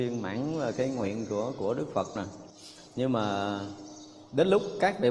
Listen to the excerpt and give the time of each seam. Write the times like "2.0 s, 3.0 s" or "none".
2.9 s